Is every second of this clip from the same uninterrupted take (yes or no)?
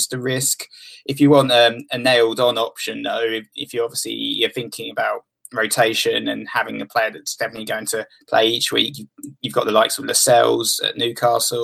yes